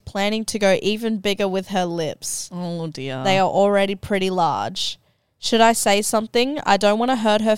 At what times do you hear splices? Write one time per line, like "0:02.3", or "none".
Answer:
none